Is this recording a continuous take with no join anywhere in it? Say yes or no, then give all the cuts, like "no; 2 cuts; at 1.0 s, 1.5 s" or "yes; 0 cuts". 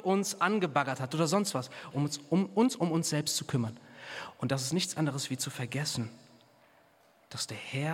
no; 1 cut; at 1.9 s